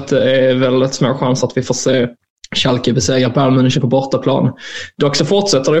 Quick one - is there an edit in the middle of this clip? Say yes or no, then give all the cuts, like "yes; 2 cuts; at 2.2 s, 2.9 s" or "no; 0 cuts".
no; 0 cuts